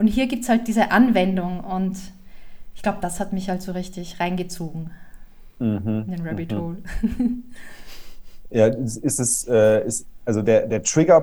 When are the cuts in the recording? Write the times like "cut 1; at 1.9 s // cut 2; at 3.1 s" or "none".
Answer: none